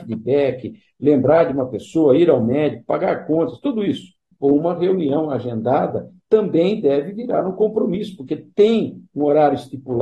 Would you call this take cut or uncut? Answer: cut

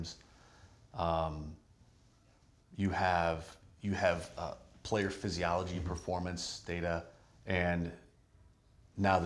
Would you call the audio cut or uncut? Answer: cut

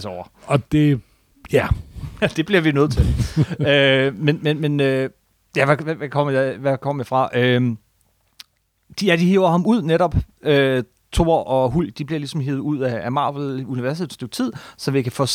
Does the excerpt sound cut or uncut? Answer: uncut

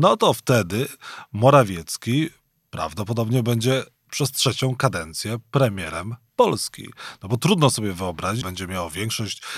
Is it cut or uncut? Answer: cut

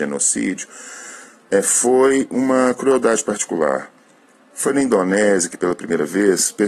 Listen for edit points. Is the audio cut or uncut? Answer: cut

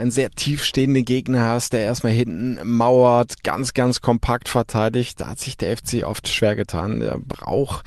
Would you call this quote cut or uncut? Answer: uncut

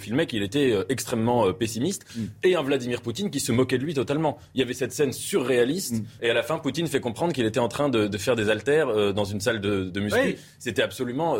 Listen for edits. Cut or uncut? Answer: cut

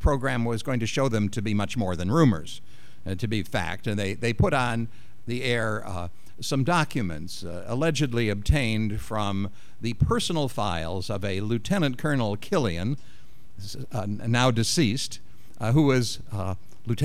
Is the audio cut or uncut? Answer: uncut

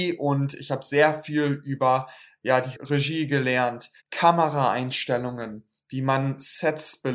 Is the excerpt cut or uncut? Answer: cut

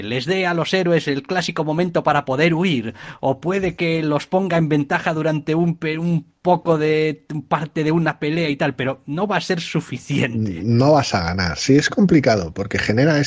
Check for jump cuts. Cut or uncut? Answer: uncut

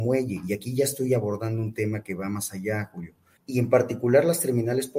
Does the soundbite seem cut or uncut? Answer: cut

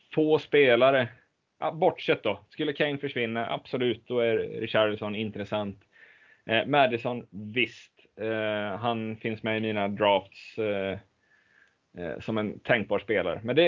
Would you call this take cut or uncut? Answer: uncut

